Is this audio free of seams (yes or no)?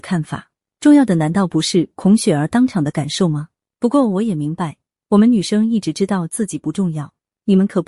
yes